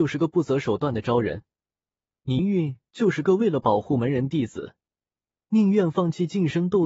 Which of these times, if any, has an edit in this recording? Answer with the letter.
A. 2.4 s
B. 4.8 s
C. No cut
A